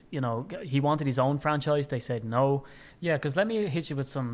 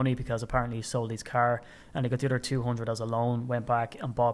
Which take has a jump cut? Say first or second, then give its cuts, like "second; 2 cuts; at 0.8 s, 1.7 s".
first; 1 cut; at 2.9 s